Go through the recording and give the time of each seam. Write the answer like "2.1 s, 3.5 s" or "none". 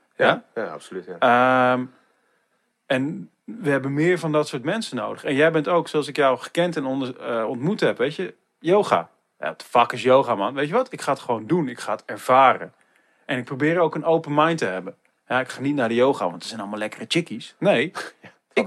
none

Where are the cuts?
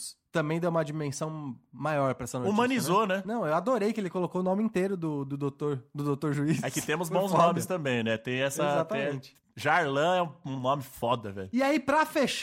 none

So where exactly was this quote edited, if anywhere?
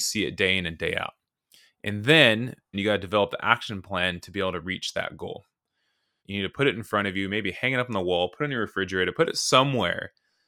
2.7 s, 6.2 s

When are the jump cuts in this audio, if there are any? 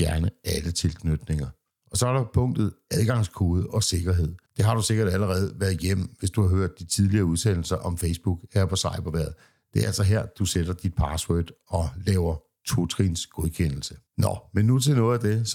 4.5 s, 14.1 s

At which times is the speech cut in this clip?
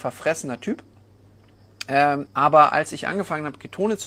2.3 s

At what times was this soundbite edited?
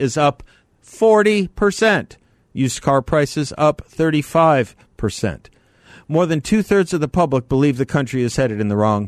none

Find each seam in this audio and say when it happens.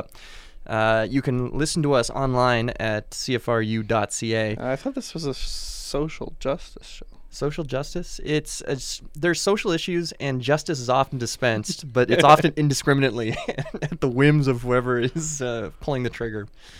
none

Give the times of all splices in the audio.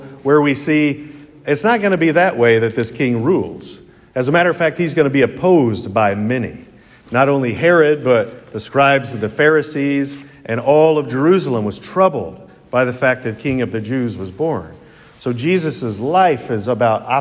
none

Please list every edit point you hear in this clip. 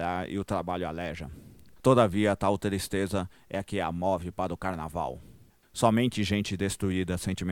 1.8 s, 5.6 s

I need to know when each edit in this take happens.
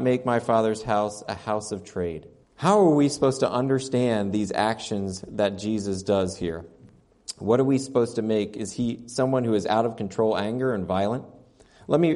2.4 s

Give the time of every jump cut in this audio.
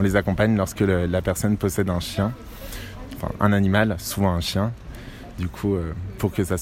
none

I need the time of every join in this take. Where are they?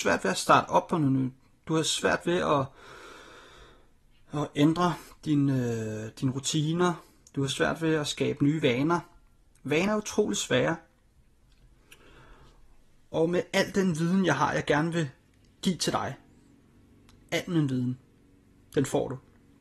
9.9 s

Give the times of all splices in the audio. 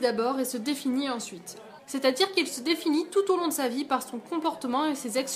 1.8 s

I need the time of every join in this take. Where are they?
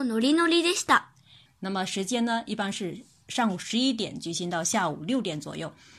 1.5 s

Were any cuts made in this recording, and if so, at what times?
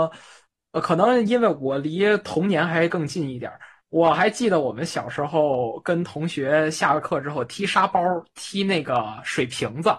none

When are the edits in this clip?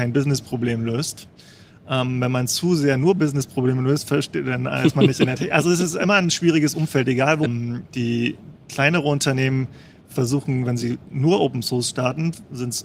7.5 s

